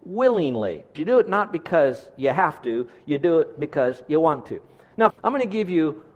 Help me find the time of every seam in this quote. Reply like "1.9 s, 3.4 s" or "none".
1.0 s, 5.1 s